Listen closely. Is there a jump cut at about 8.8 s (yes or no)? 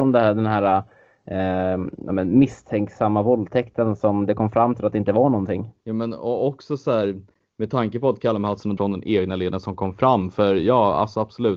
yes